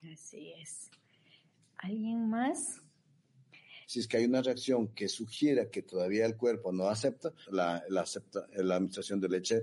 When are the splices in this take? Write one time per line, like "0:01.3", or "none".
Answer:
0:03.8
0:07.4